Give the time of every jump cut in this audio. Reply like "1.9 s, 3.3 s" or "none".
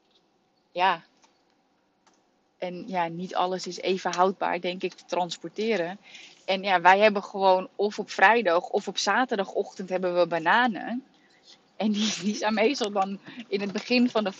none